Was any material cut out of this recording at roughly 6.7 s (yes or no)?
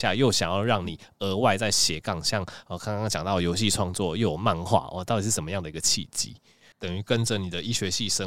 yes